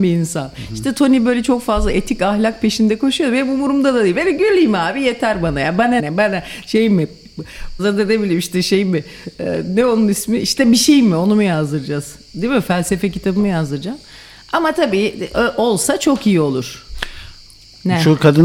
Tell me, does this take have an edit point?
yes; 2 cuts; at 6.0 s, 7.8 s

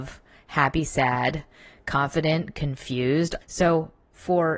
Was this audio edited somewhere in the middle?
yes; 1 cut; at 3.4 s

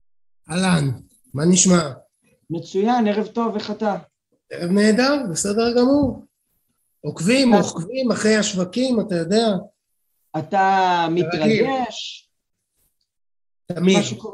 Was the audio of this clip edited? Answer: no; 0 cuts

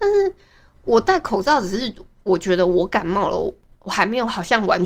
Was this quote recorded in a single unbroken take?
yes; 0 cuts

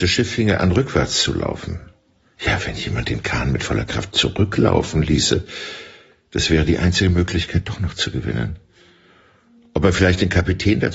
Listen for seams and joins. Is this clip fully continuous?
yes; 0 cuts

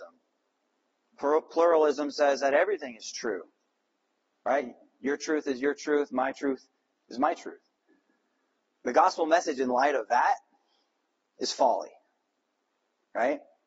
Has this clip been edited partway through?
no; 0 cuts

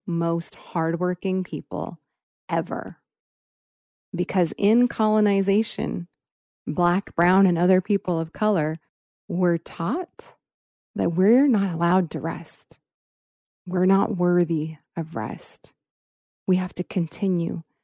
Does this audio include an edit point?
yes; 1 cut; at 3.9 s

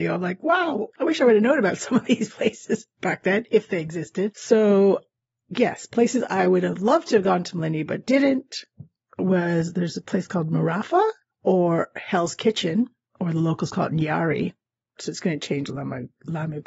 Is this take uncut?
no; 1 cut; at 15.0 s

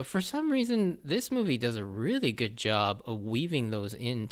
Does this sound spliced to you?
no; 0 cuts

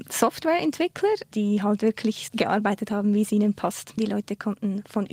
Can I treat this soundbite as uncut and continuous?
no; 2 cuts; at 2.3 s, 4.0 s

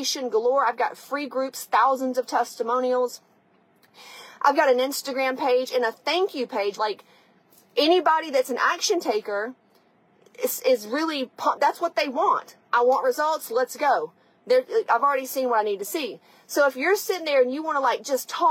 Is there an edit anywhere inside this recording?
yes; 1 cut; at 6.8 s

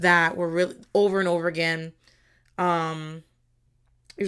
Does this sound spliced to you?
no; 0 cuts

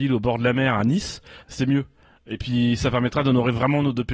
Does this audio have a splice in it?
yes; 1 cut; at 1.4 s

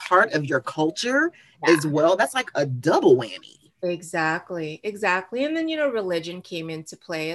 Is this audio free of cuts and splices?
yes; 0 cuts

